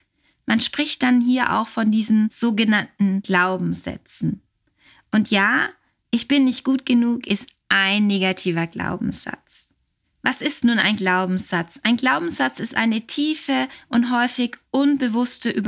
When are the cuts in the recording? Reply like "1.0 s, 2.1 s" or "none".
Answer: none